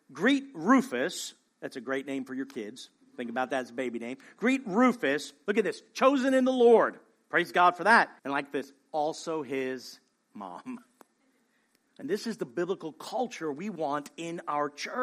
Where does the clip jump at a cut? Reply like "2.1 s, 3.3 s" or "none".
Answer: 8.2 s, 11.8 s